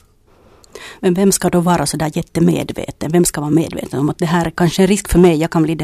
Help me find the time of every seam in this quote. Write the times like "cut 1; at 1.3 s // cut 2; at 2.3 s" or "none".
none